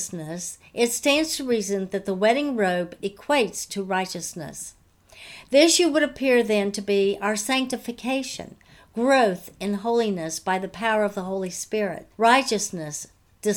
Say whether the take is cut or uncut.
cut